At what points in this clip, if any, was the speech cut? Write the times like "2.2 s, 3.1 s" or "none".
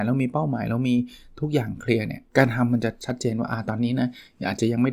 2.3 s